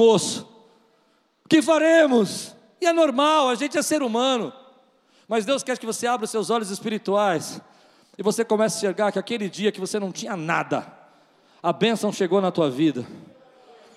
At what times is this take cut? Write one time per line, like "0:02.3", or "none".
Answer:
none